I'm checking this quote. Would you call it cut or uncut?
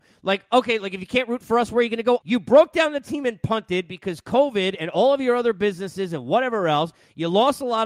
cut